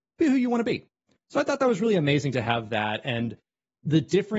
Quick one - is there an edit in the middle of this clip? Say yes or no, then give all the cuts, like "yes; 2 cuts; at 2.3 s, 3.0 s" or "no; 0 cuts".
no; 0 cuts